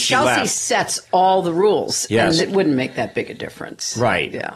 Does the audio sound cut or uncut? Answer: cut